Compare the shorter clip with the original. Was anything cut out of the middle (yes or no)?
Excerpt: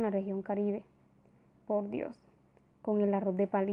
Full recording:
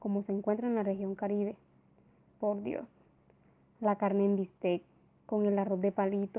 yes